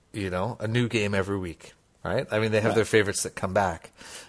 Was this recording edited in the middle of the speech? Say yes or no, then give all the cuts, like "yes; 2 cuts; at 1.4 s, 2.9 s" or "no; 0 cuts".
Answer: yes; 1 cut; at 2.0 s